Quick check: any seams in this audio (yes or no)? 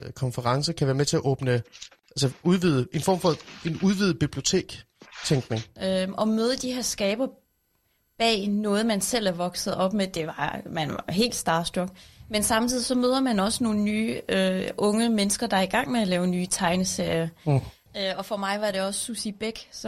yes